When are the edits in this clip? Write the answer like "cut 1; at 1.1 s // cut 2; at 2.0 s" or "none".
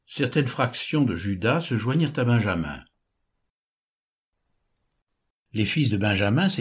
cut 1; at 5.3 s